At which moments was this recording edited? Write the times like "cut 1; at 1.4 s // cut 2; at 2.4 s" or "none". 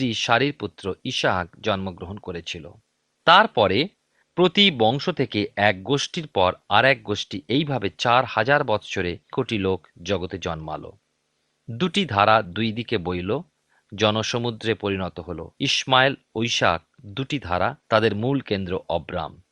cut 1; at 9.3 s // cut 2; at 15.6 s // cut 3; at 17.8 s